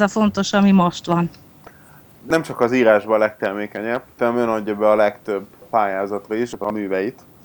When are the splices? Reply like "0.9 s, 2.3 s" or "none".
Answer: none